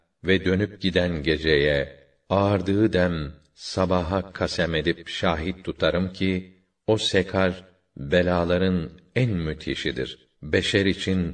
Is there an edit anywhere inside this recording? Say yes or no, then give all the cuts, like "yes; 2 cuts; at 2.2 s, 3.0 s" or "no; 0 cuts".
no; 0 cuts